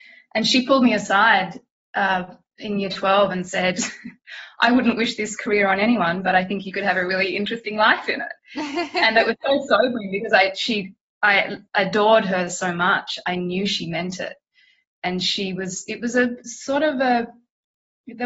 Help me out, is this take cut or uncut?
uncut